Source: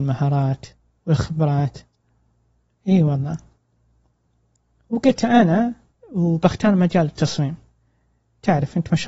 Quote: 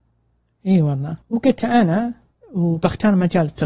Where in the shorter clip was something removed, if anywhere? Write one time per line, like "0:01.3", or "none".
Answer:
0:01.2